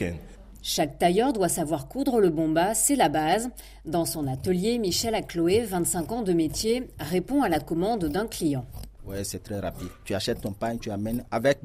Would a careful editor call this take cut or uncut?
cut